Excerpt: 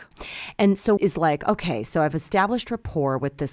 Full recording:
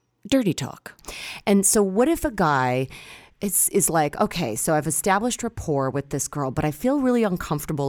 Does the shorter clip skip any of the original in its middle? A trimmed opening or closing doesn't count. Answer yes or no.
yes